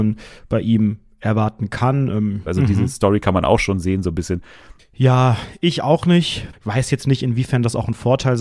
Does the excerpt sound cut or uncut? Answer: cut